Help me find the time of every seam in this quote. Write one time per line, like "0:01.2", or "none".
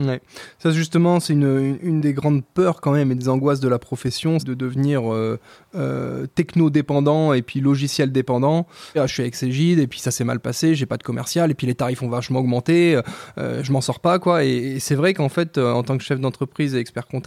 0:04.4
0:08.9